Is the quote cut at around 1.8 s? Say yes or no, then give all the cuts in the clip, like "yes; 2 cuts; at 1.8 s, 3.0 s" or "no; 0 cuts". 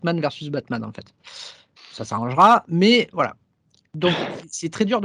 yes; 1 cut; at 1.8 s